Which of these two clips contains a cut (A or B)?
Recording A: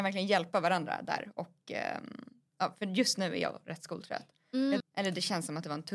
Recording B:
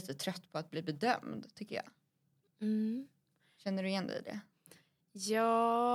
A